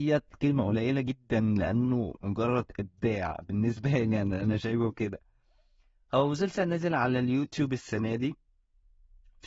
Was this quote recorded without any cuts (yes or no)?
yes